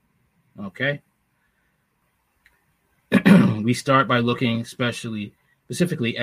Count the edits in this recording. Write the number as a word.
one